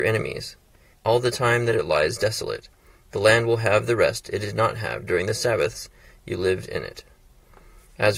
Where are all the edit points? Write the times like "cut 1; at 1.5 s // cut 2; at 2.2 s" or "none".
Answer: cut 1; at 0.9 s